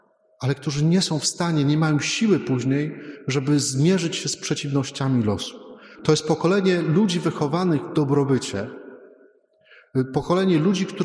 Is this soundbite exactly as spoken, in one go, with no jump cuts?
no; 1 cut; at 6.0 s

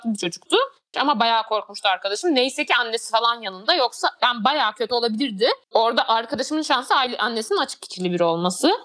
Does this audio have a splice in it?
yes; 2 cuts; at 0.9 s, 5.6 s

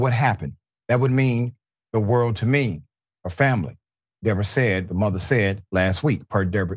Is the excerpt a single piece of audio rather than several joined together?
yes; 0 cuts

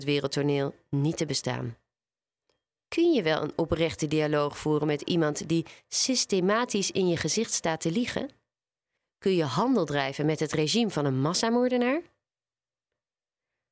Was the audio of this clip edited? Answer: no; 0 cuts

